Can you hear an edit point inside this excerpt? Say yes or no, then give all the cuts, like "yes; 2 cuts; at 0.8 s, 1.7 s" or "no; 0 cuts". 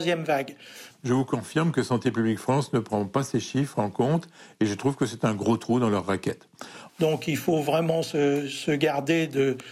yes; 2 cuts; at 0.9 s, 6.9 s